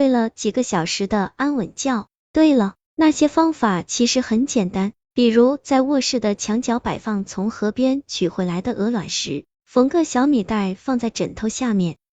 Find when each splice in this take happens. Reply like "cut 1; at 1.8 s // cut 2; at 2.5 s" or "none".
cut 1; at 2.9 s